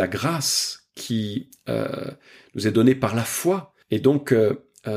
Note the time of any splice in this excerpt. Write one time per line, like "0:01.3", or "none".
0:03.8

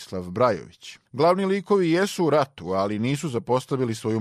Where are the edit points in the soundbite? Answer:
0:01.1

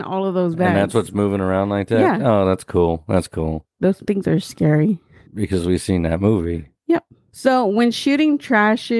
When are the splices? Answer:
0:05.3

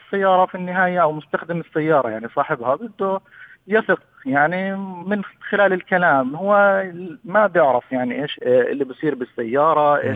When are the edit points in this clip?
0:08.4

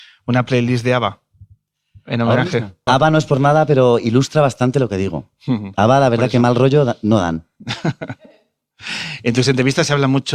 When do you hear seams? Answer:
0:02.9

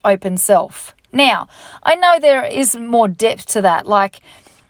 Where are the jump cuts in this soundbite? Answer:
0:01.1

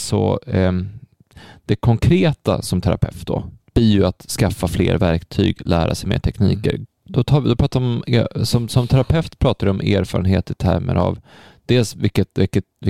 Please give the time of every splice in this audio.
0:06.8

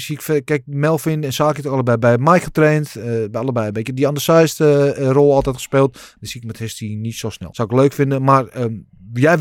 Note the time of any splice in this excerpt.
0:06.2
0:07.5

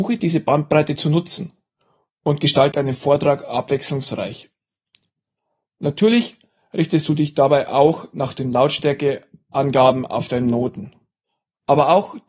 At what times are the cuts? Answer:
0:02.7

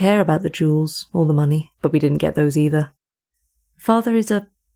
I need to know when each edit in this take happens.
0:01.7

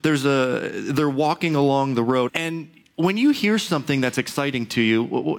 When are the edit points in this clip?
0:02.3

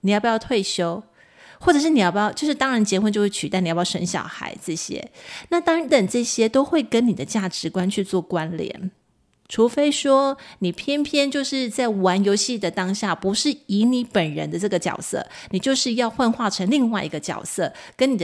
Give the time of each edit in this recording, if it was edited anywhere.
0:05.9

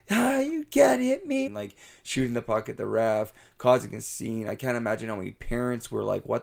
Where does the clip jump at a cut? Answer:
0:01.5

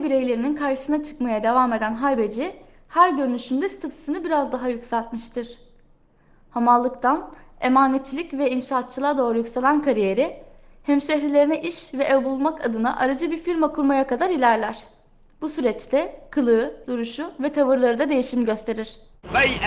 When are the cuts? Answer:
0:16.8

